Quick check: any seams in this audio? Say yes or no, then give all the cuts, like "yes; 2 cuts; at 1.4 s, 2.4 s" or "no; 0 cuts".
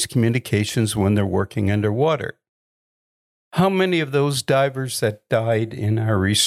yes; 1 cut; at 3.4 s